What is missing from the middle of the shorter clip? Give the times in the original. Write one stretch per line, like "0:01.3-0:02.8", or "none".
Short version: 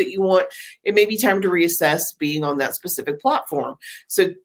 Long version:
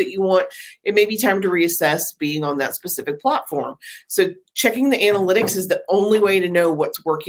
none